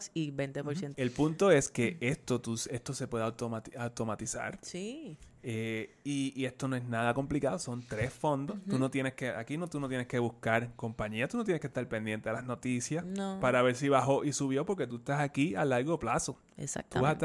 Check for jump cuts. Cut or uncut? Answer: cut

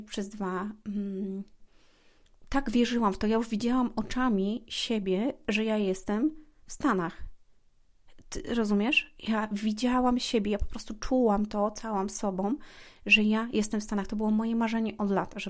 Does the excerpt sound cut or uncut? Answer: uncut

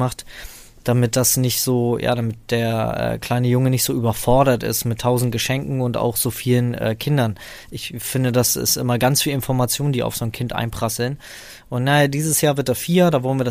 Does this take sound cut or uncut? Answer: uncut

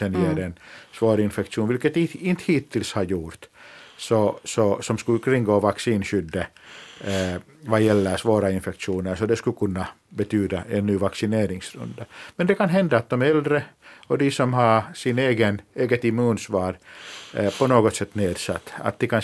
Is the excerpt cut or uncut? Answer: uncut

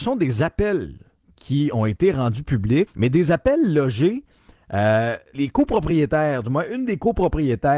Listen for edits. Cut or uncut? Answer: cut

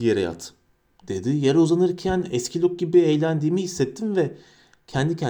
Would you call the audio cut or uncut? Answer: uncut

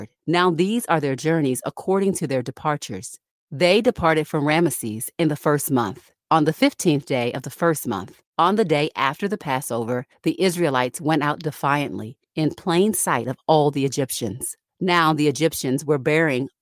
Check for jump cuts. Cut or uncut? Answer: uncut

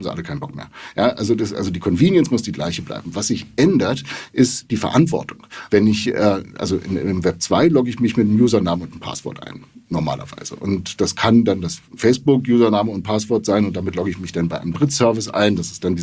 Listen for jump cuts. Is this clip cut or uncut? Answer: cut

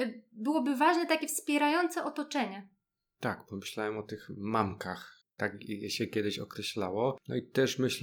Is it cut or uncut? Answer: cut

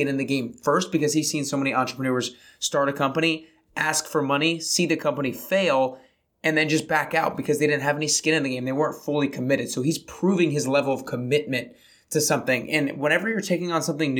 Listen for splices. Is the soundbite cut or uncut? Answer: uncut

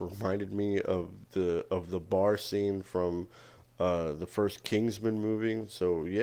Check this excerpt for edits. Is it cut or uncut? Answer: uncut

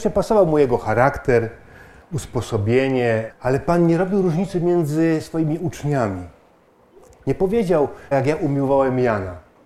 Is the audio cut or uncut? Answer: cut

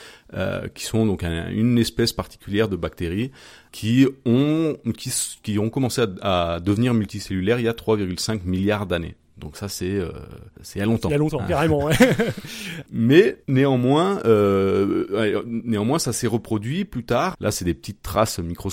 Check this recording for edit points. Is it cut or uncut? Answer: cut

